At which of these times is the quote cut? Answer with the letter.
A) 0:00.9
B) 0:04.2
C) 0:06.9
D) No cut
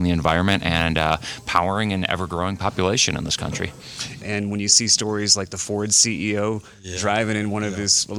B